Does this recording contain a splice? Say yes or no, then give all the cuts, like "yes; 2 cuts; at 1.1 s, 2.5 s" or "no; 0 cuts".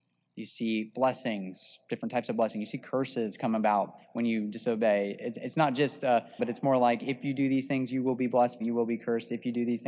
yes; 2 cuts; at 6.4 s, 8.6 s